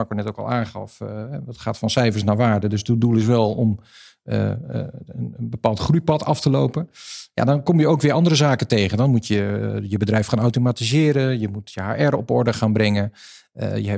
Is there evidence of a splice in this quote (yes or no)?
no